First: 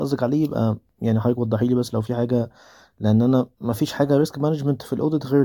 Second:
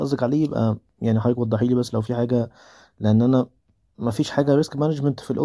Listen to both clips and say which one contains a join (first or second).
first